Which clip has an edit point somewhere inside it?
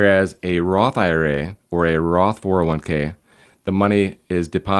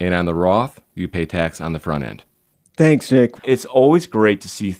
second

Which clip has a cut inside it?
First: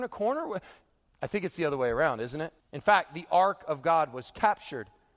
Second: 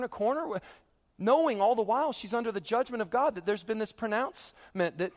first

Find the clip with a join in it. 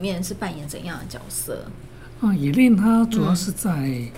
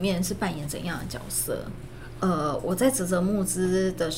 second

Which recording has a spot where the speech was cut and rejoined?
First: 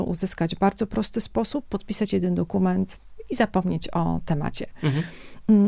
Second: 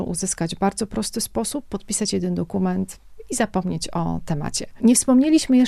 second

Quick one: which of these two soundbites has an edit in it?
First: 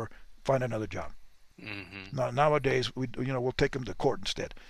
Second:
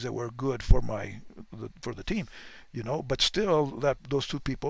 first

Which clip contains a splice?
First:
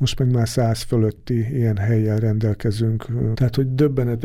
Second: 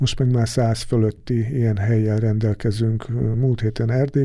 first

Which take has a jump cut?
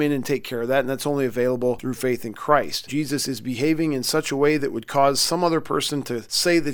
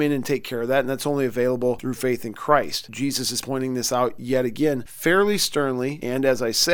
first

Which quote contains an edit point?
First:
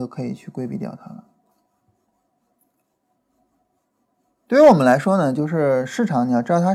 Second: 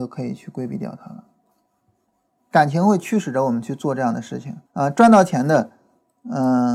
second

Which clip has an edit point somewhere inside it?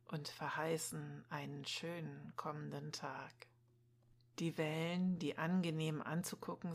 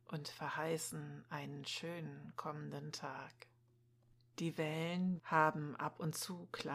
second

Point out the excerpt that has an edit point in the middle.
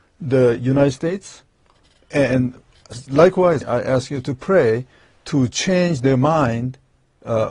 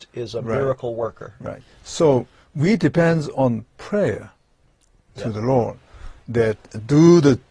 first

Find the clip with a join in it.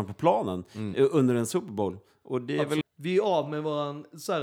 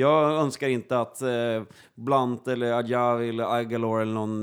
first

